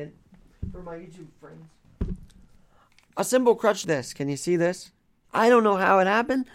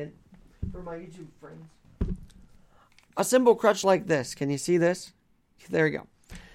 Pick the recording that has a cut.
first; 2 cuts; at 3.8 s, 5.2 s

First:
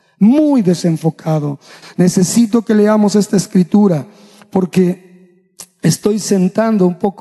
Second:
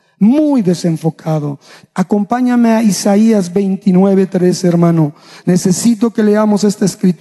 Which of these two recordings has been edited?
first; 1 cut; at 1.8 s

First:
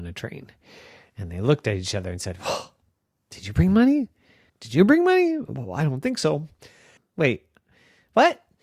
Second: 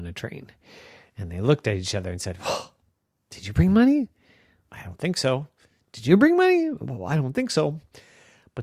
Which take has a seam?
first; 2 cuts; at 4.5 s, 7.0 s

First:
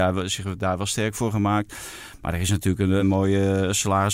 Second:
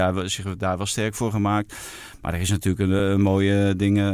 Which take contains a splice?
first; 1 cut; at 3.0 s

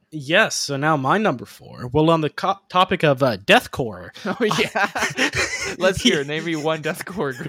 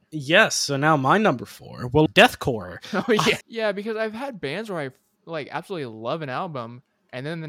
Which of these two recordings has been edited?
second; 2 cuts; at 2.1 s, 3.4 s

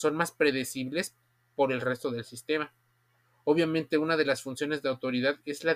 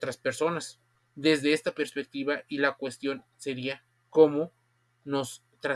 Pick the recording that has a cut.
second; 1 cut; at 1.0 s

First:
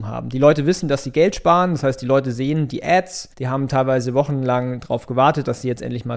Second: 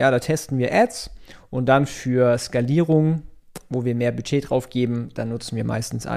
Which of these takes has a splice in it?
first; 1 cut; at 3.3 s

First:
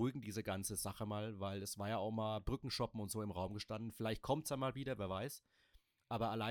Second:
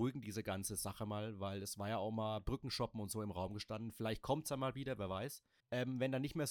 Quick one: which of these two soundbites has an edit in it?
second; 1 cut; at 5.6 s

